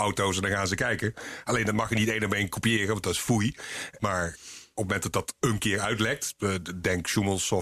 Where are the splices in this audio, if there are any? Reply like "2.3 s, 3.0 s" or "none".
4.0 s